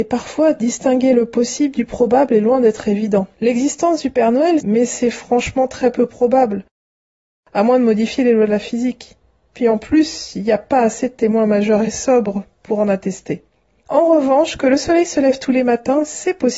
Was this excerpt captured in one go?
no; 1 cut; at 4.6 s

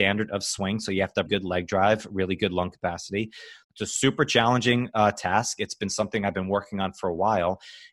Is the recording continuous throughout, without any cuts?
no; 2 cuts; at 1.3 s, 3.6 s

